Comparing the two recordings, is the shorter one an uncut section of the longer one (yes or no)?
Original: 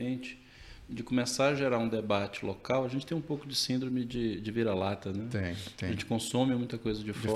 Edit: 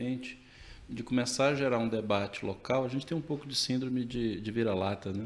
yes